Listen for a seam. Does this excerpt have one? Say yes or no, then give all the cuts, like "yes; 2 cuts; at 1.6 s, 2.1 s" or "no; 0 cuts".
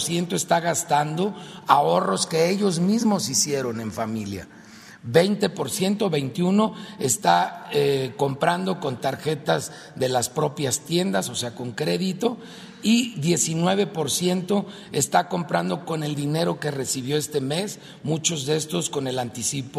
no; 0 cuts